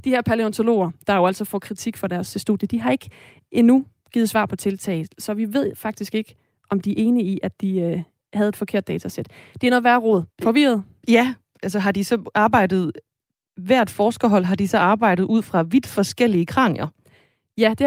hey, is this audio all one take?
no; 2 cuts; at 10.3 s, 11.6 s

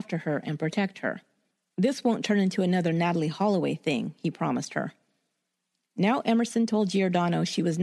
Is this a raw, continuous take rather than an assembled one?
yes; 0 cuts

